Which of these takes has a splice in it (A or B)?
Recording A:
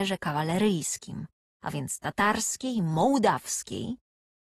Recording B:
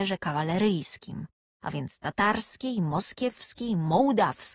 A